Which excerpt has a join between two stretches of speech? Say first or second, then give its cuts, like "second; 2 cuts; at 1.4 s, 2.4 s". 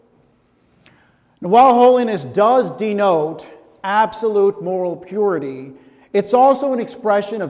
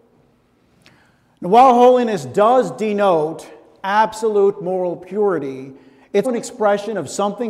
second; 1 cut; at 6.2 s